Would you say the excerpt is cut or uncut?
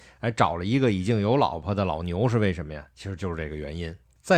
uncut